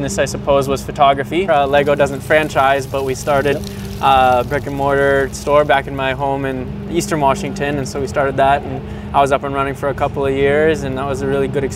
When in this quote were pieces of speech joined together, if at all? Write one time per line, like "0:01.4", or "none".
0:01.5